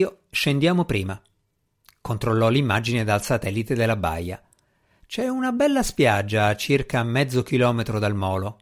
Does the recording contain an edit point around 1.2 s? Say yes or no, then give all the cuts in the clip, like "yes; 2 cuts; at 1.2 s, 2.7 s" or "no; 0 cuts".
no; 0 cuts